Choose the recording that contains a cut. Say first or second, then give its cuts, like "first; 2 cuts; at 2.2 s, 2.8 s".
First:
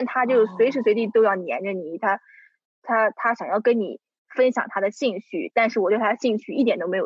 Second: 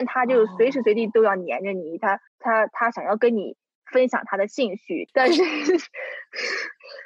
second; 2 cuts; at 2.3 s, 5.1 s